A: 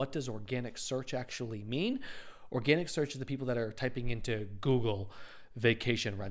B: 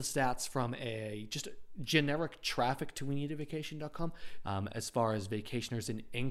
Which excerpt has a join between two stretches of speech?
B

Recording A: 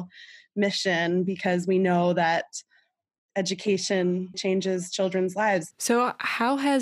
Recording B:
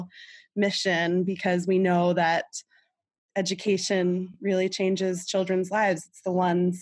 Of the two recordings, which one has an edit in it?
A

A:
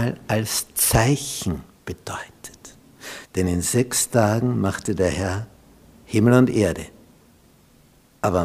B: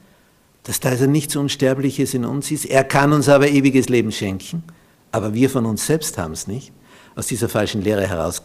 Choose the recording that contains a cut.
A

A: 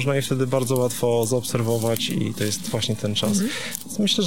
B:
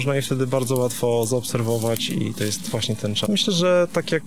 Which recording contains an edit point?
B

